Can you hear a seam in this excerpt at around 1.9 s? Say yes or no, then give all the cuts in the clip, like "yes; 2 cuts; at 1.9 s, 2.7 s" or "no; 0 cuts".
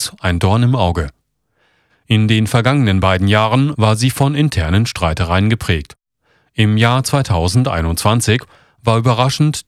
yes; 1 cut; at 1.9 s